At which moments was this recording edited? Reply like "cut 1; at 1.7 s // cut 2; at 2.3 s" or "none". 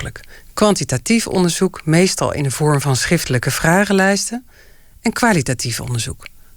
none